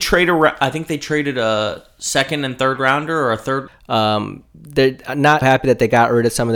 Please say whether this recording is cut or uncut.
cut